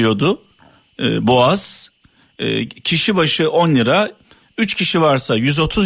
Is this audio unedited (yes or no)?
yes